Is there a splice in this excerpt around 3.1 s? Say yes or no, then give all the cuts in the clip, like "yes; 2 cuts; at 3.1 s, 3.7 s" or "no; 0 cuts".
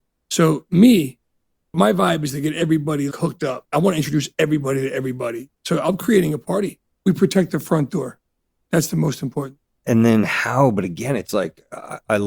yes; 2 cuts; at 3.1 s, 6.9 s